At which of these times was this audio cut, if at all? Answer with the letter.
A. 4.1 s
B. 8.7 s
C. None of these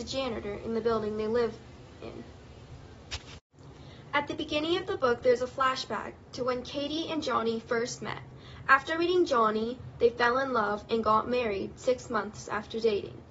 C